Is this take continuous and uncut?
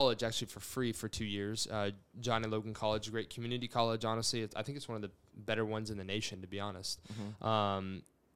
yes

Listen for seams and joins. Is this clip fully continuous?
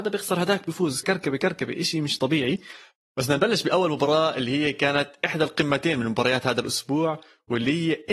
no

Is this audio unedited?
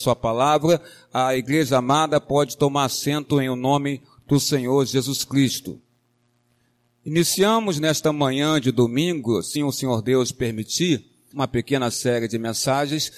no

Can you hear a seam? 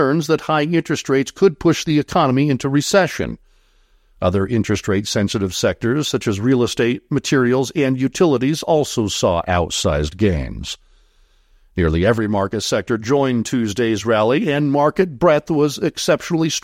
no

